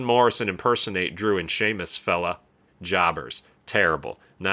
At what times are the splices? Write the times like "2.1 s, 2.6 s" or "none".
2.7 s